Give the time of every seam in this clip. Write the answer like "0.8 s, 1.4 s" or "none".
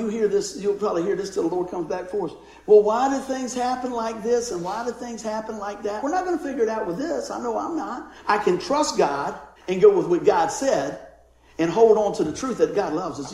6.0 s, 8.2 s, 9.6 s